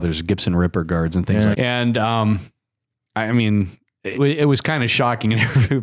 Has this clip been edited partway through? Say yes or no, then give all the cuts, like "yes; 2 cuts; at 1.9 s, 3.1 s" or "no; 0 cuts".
yes; 2 cuts; at 1.5 s, 4.1 s